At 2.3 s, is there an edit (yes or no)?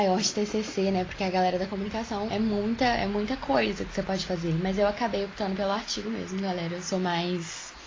yes